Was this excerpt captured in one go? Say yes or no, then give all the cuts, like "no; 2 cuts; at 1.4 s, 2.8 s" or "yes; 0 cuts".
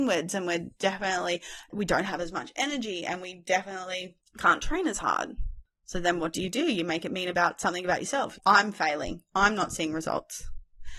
no; 1 cut; at 8.3 s